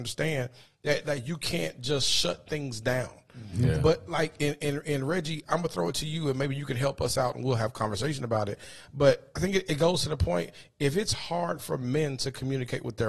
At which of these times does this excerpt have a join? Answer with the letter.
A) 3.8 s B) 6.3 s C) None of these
C